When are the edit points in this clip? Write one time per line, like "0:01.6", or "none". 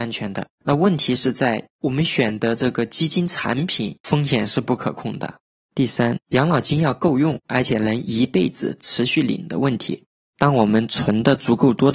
0:10.3